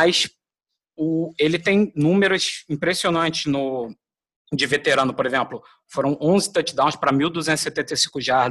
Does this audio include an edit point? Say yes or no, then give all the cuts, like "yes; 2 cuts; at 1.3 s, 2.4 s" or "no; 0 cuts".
no; 0 cuts